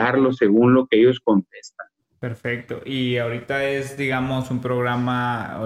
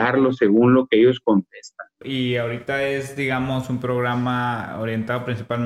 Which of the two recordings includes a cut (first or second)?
second